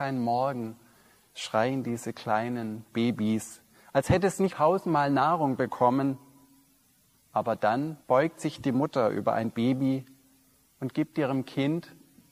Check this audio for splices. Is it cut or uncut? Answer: cut